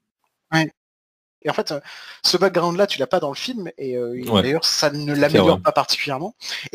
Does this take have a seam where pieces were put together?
yes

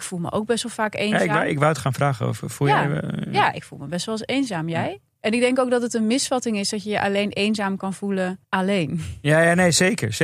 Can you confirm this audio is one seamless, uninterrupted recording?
no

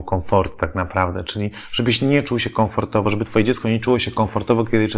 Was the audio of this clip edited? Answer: no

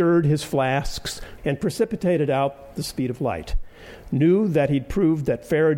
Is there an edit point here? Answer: yes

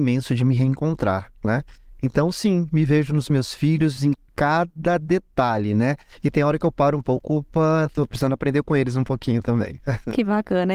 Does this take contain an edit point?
no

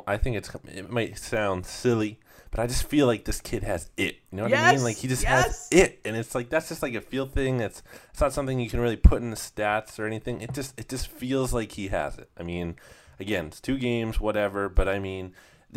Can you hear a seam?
no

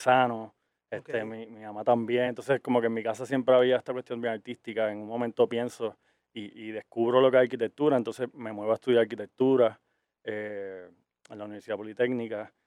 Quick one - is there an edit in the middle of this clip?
no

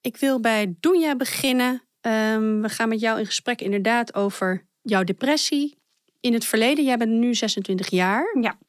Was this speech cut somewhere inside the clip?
no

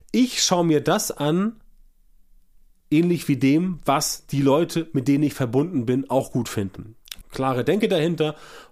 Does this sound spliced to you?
yes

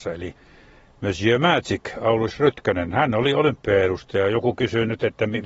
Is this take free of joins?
yes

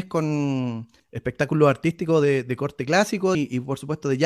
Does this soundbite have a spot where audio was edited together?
yes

